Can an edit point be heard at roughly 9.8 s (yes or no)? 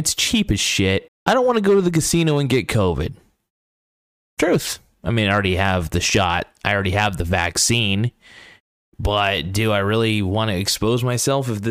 no